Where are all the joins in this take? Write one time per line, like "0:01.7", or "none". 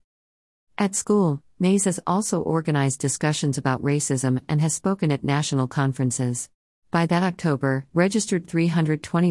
0:06.7
0:07.9